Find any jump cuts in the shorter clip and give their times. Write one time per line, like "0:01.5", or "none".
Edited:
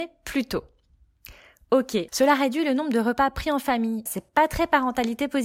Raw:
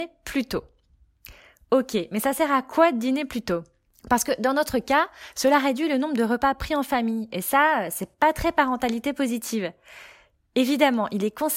0:02.1
0:04.1